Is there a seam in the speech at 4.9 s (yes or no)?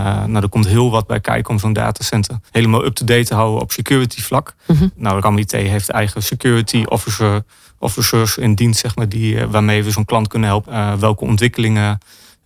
no